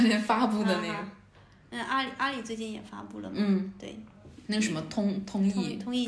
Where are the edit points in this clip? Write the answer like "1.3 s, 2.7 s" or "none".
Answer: none